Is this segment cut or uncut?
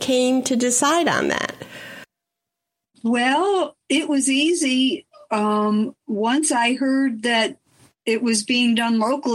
uncut